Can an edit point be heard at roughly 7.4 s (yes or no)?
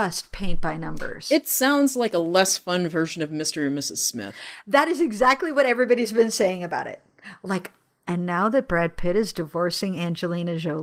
no